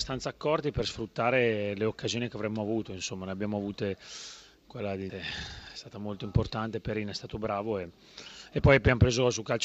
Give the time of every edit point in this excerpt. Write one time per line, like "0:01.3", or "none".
0:05.1